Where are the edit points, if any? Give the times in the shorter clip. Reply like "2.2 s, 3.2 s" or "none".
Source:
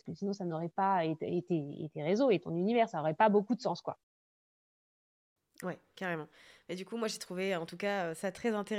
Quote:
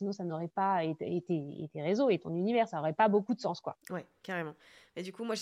3.8 s